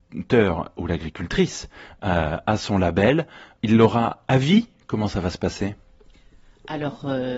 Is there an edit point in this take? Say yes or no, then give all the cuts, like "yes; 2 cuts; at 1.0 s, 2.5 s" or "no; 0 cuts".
yes; 1 cut; at 3.6 s